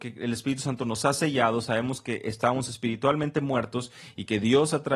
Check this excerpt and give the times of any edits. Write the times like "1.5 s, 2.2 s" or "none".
none

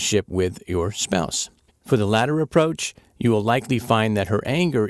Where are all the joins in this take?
1.7 s

